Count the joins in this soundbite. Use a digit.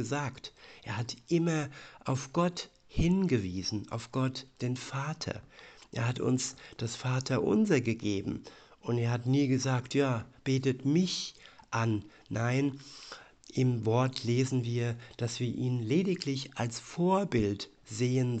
0